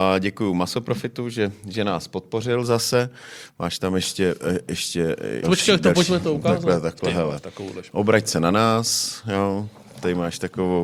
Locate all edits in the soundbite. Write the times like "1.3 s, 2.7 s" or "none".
5.4 s